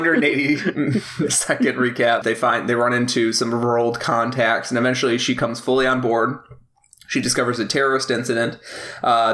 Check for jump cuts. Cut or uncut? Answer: cut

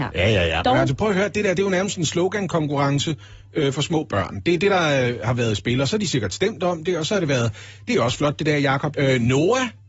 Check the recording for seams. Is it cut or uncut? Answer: cut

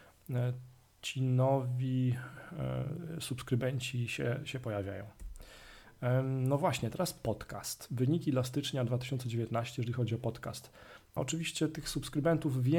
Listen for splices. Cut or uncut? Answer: cut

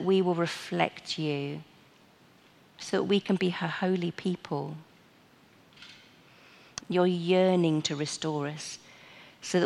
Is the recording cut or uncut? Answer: cut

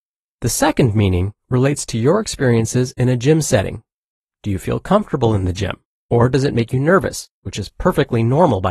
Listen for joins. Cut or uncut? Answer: uncut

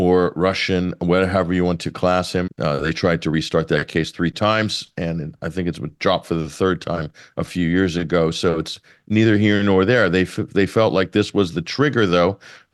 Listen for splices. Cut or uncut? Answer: cut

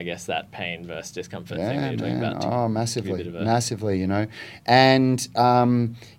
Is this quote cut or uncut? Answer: uncut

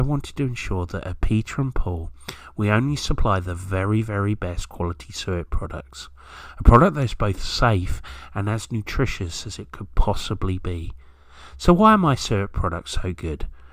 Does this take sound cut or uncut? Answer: uncut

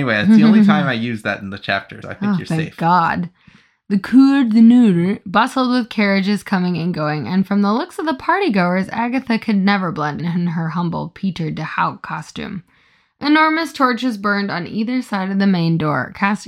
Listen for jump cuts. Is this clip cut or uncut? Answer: cut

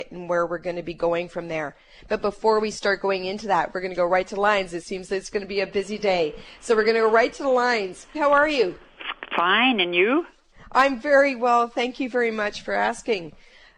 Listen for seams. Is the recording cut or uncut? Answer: cut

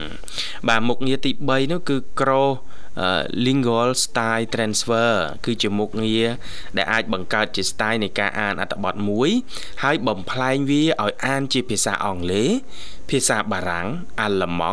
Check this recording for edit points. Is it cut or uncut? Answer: uncut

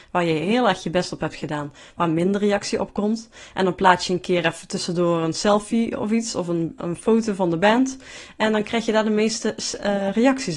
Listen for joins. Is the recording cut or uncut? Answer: uncut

